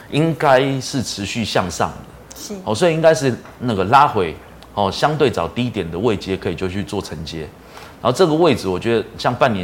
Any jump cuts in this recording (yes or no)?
no